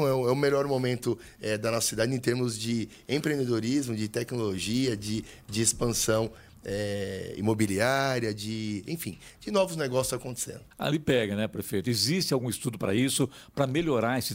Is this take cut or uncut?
cut